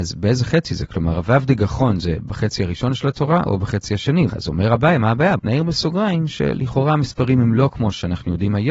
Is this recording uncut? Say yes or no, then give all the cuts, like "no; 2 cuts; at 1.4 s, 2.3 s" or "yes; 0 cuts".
no; 2 cuts; at 4.3 s, 5.4 s